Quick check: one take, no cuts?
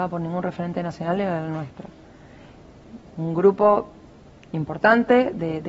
yes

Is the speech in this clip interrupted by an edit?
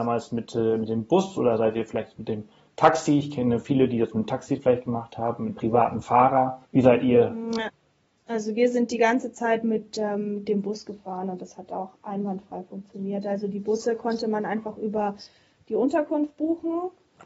yes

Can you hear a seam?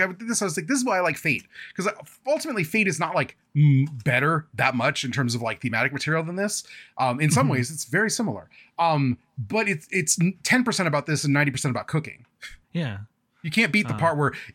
yes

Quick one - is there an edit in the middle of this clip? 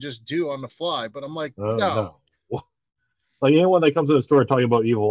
no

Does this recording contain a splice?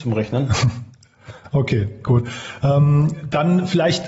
no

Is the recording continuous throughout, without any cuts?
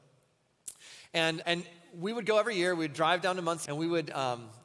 no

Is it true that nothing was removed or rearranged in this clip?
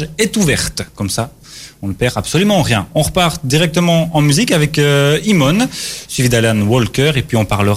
yes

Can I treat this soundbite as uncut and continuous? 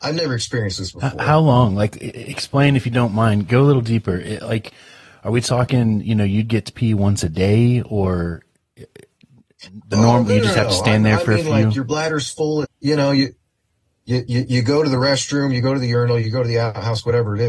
no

